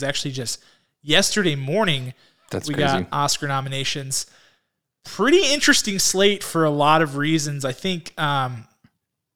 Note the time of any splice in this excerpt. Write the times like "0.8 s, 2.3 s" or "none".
none